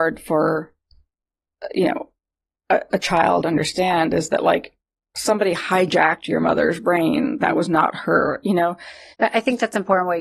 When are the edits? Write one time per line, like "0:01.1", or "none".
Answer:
0:03.4
0:09.1